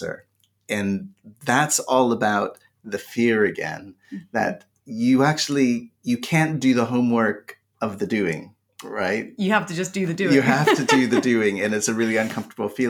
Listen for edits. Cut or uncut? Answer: uncut